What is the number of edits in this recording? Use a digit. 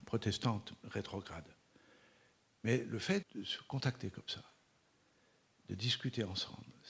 1